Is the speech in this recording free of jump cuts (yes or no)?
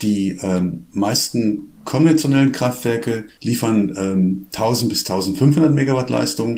no